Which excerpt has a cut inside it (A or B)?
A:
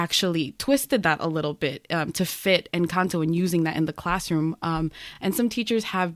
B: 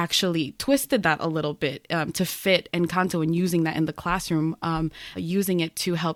B